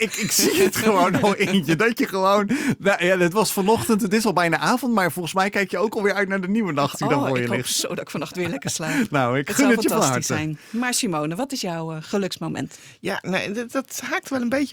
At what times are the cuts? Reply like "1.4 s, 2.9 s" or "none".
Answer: none